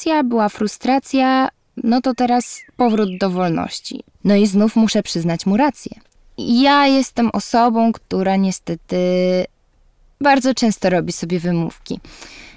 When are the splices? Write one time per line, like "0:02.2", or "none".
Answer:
0:04.1